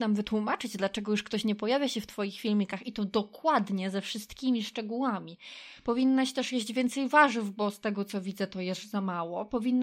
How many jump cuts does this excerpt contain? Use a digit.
1